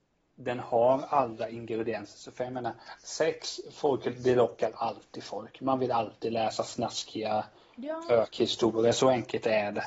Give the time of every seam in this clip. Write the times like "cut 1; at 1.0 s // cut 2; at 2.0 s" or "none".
none